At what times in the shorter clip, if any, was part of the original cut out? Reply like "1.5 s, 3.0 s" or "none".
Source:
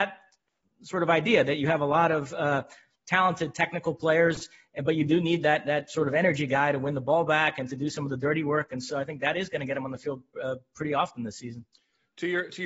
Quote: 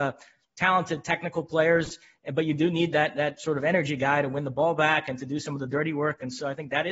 none

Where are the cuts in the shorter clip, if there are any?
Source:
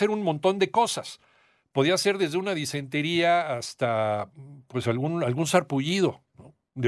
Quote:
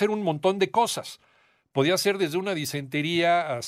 none

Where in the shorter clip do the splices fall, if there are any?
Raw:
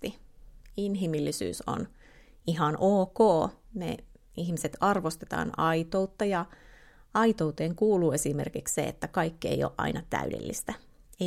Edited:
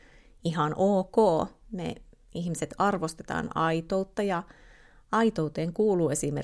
none

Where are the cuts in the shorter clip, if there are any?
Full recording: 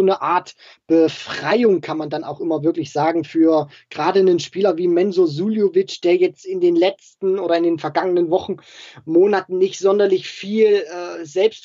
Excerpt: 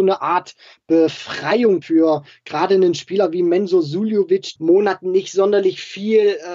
1.8 s, 4.6 s

